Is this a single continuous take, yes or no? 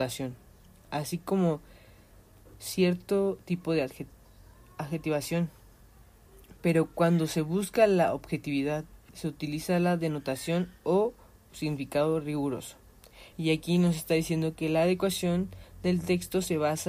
no